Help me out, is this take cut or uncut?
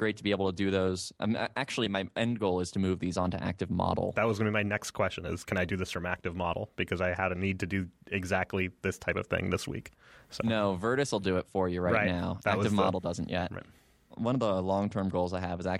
uncut